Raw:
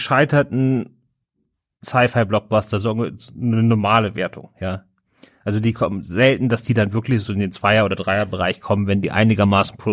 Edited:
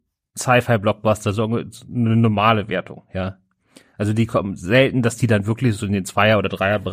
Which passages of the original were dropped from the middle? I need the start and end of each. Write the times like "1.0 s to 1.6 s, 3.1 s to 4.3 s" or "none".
none